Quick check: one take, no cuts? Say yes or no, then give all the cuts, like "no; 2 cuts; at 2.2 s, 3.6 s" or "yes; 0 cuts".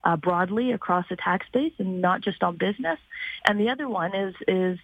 yes; 0 cuts